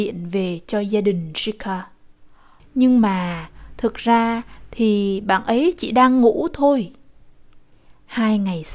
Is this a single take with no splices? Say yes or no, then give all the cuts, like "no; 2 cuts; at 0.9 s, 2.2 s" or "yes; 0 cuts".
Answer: no; 1 cut; at 2.6 s